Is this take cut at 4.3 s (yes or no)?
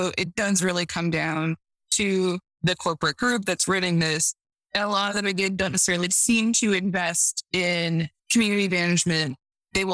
no